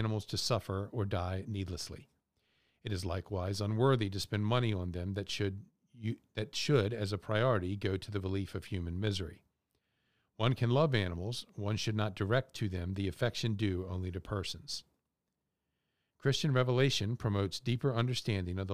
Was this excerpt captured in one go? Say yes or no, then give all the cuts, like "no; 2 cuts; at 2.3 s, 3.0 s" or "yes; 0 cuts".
yes; 0 cuts